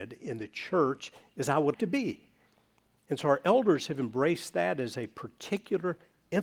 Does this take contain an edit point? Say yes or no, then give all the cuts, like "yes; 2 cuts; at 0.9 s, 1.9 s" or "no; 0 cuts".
yes; 1 cut; at 1.7 s